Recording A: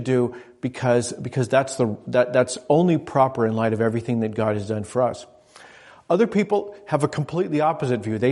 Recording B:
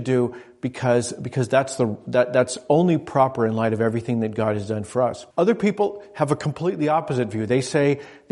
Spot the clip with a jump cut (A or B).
B